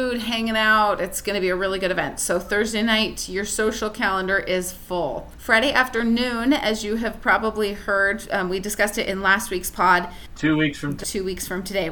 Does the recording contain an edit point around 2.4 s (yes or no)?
no